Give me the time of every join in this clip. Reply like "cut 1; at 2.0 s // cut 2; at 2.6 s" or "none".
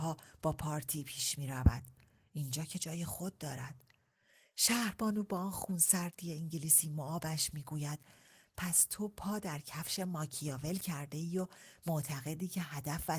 none